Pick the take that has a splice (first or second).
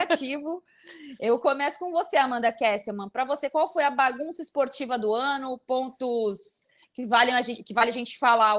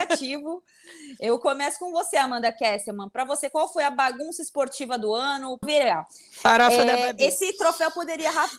second